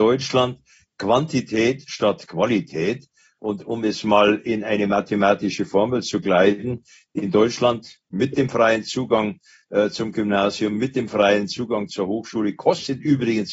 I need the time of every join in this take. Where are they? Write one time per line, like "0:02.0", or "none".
none

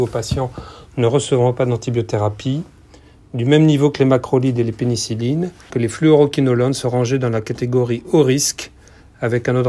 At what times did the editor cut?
0:05.7

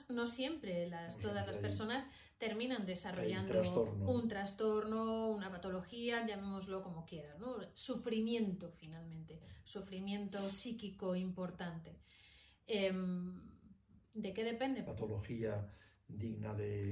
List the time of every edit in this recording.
0:14.9

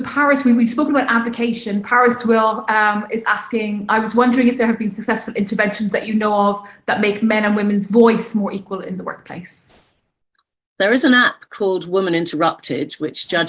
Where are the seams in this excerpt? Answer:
none

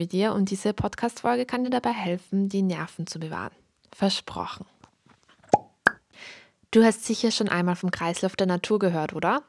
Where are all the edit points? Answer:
none

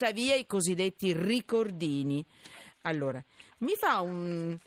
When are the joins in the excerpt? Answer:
0:02.7

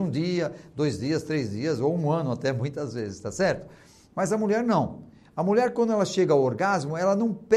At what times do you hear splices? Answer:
none

